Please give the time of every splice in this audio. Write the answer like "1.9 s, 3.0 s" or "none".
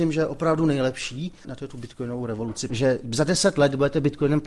1.4 s, 2.7 s